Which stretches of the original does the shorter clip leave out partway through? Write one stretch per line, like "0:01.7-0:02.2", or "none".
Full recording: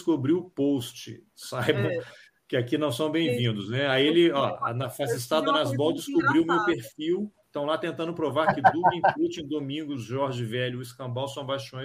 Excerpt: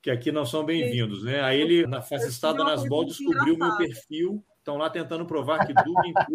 0:04.3-0:04.7